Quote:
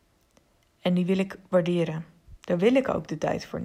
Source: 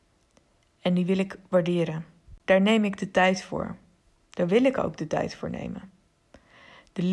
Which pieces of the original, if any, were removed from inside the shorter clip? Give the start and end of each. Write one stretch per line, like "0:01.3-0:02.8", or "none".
0:02.4-0:04.3

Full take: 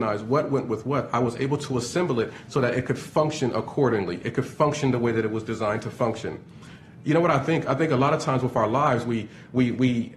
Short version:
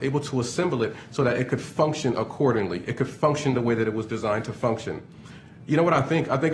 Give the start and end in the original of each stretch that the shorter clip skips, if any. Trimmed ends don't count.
none

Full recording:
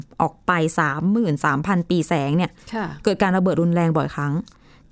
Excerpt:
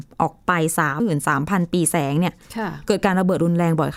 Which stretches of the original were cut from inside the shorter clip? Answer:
0:01.0-0:01.2

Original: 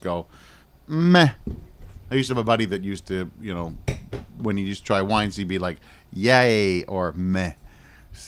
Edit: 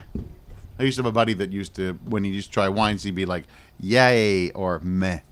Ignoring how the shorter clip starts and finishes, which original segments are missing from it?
0:03.3-0:04.3

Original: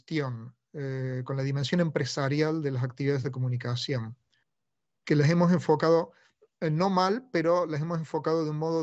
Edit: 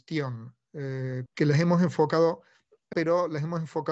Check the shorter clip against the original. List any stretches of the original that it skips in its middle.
0:01.3-0:05.0
0:06.6-0:07.3

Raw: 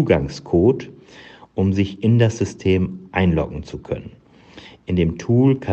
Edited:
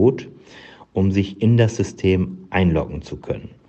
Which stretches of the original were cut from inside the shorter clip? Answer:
none

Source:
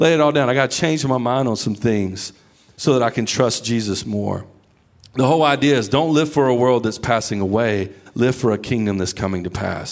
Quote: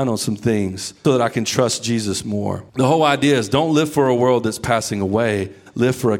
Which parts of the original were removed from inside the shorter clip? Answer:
0:02.4-0:02.9
0:04.5-0:05.1

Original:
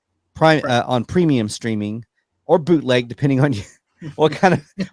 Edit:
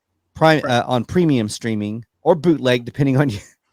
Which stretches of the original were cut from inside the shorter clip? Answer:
0:02.1-0:02.4

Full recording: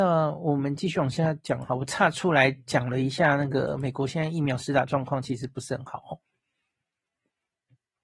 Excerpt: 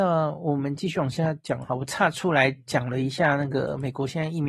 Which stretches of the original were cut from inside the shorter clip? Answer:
none

